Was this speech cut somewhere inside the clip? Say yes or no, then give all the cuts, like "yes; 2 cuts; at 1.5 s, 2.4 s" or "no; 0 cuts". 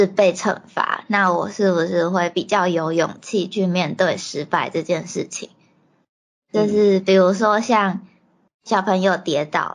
no; 0 cuts